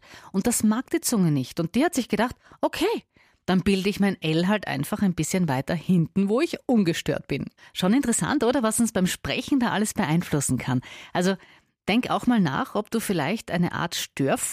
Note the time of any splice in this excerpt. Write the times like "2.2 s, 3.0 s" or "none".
none